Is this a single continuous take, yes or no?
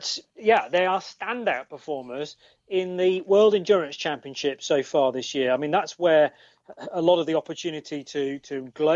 yes